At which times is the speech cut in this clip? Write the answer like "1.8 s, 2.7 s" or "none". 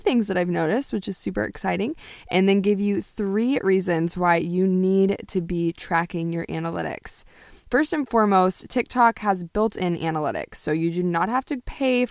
none